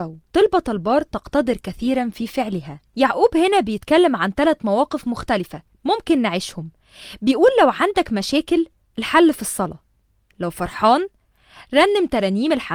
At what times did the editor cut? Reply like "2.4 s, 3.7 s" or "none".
2.9 s